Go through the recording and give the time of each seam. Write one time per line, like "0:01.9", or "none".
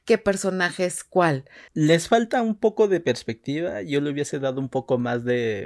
0:01.7